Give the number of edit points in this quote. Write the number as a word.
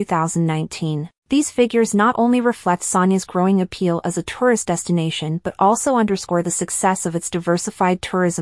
one